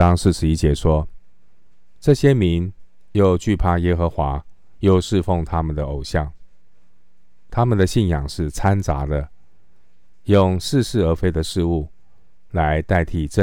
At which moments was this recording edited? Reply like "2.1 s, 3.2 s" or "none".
7.5 s